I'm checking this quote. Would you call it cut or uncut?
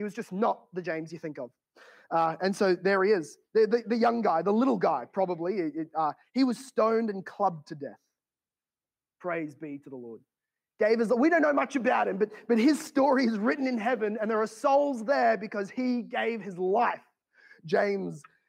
uncut